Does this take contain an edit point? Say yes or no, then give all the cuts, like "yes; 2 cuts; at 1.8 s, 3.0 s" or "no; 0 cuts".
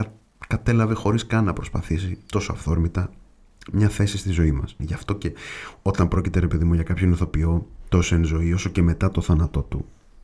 yes; 1 cut; at 4.8 s